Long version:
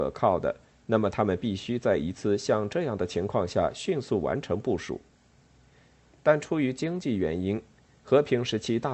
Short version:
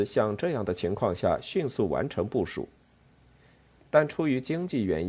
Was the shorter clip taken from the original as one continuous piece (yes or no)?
yes